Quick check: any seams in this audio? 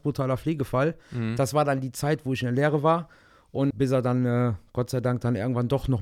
yes; 1 cut; at 3.7 s

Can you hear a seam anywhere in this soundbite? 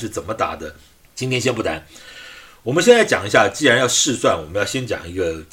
yes; 1 cut; at 1.0 s

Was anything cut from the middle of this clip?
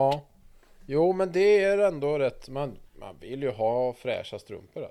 no; 0 cuts

